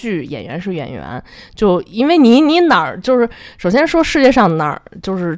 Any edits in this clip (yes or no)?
no